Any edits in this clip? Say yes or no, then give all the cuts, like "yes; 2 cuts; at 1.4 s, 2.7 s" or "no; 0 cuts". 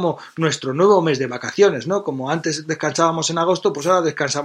no; 0 cuts